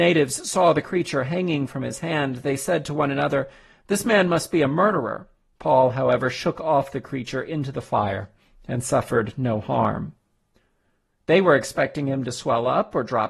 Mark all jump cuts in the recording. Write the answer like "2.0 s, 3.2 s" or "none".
5.5 s